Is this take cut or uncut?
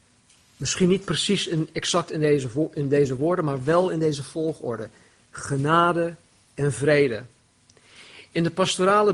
uncut